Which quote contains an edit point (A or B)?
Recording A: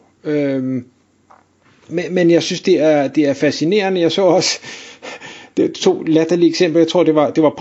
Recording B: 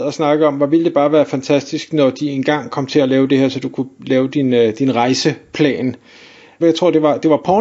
B